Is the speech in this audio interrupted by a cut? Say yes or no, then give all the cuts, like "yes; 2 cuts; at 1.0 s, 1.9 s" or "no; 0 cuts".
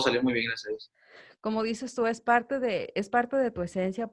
no; 0 cuts